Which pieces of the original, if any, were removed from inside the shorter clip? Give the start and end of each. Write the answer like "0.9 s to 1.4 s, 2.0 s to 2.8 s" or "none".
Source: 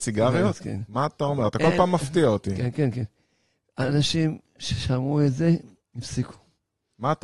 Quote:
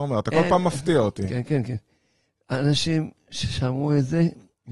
none